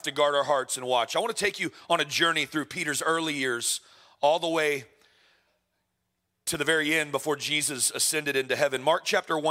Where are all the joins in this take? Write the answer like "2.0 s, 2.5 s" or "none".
none